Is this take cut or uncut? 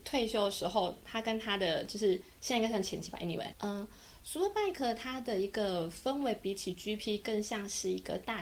cut